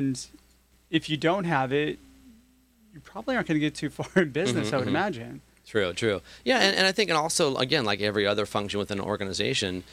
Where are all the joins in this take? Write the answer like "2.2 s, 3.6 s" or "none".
none